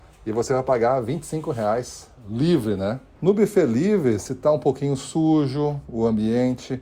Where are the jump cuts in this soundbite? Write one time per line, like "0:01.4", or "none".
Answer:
0:03.2